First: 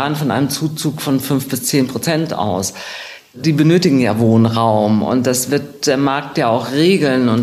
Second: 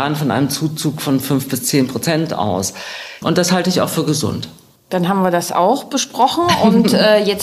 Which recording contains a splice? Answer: second; 1 cut; at 3.2 s

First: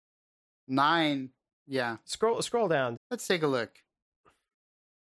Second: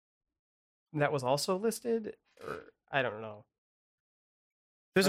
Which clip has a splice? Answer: first; 2 cuts; at 1.5 s, 3.0 s

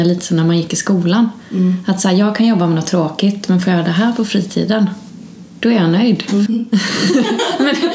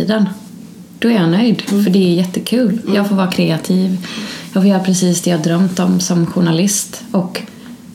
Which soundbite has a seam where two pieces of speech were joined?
first; 1 cut; at 6.5 s

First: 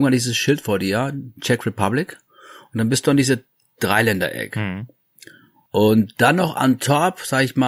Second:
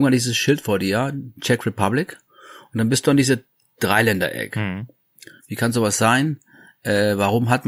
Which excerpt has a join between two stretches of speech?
second; 1 cut; at 5.4 s

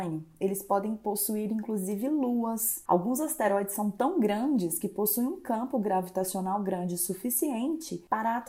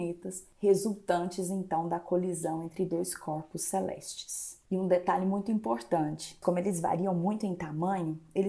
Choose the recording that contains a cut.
second; 1 cut; at 6.4 s

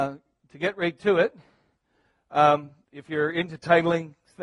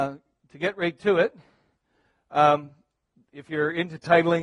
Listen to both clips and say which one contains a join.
first; 1 cut; at 2.8 s

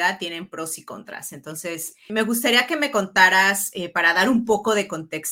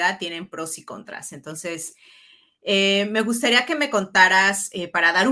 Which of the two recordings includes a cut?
first; 1 cut; at 2.1 s

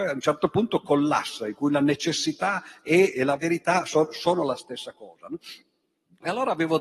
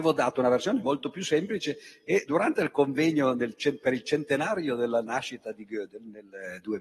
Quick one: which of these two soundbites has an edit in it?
first; 1 cut; at 3.1 s

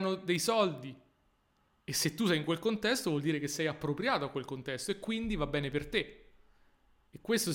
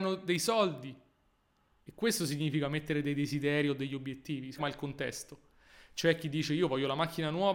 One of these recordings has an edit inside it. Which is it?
second; 2 cuts; at 1.7 s, 4.6 s

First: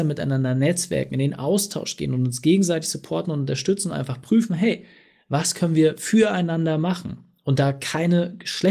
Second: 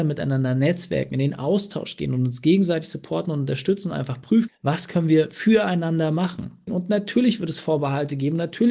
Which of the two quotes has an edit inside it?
second; 2 cuts; at 4.5 s, 6.7 s

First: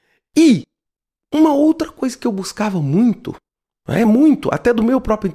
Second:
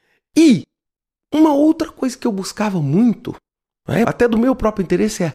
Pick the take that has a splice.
second; 1 cut; at 4.0 s

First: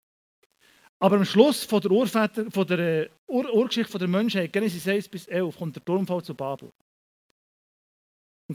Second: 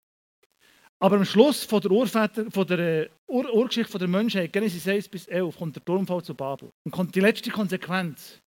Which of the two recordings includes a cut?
second; 1 cut; at 6.7 s

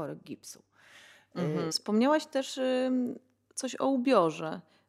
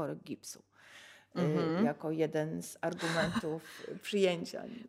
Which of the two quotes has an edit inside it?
first; 1 cut; at 1.7 s

